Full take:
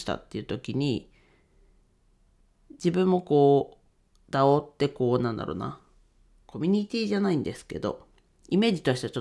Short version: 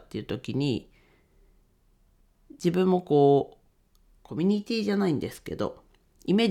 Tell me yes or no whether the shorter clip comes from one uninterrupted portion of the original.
no